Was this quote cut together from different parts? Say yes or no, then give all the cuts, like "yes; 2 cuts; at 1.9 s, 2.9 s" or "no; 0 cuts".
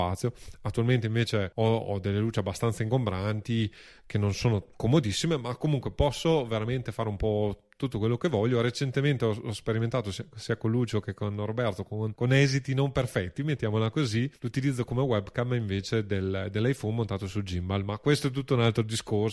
no; 0 cuts